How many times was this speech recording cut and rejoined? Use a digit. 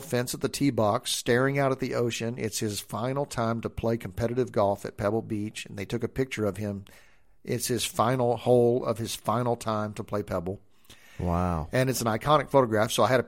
0